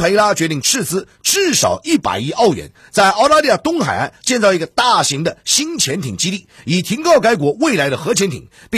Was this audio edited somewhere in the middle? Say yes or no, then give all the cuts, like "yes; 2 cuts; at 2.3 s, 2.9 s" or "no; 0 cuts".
no; 0 cuts